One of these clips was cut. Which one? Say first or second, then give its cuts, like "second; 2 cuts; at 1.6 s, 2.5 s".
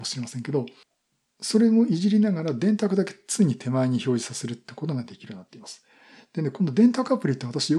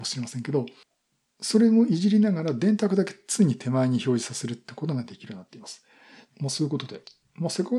second; 1 cut; at 6.3 s